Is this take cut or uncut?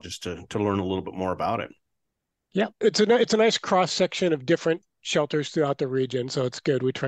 cut